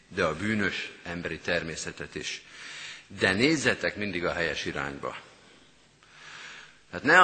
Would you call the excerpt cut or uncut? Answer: uncut